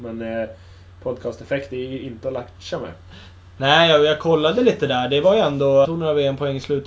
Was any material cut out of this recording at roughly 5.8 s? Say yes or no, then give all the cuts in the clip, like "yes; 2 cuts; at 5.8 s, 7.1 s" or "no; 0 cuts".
yes; 1 cut; at 5.8 s